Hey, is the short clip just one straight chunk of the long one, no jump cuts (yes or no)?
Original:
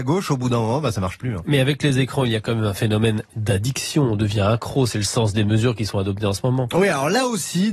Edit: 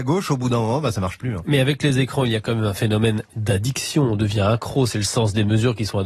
yes